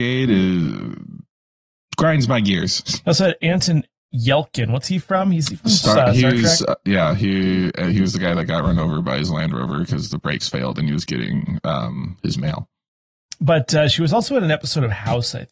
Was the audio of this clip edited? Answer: no; 0 cuts

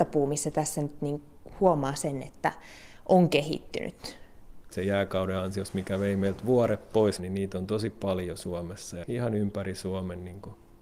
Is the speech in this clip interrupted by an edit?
yes; 3 cuts; at 4.7 s, 7.2 s, 9.0 s

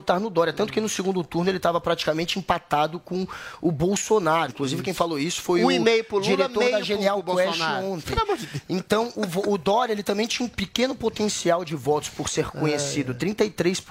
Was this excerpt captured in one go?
no; 1 cut; at 4.5 s

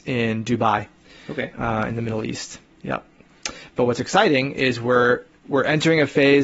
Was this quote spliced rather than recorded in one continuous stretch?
no; 0 cuts

